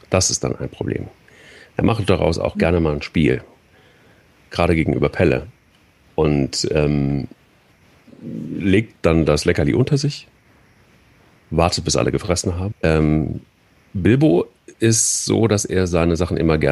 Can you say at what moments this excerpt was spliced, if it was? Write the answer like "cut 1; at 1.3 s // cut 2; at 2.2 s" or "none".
cut 1; at 12.7 s